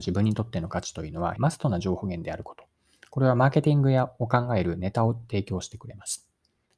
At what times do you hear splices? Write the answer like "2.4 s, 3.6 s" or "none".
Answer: 1.4 s